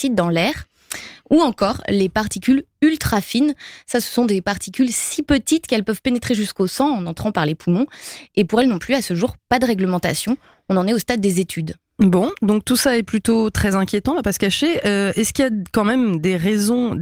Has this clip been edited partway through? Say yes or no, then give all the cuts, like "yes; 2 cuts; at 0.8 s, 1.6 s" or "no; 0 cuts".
no; 0 cuts